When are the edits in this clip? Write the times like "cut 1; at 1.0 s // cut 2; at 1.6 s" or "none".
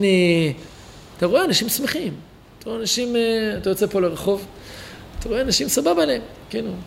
none